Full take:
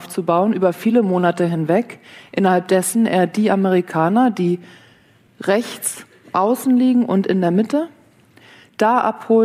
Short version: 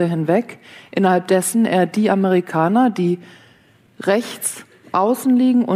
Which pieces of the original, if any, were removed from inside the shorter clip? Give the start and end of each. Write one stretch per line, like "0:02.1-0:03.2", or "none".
none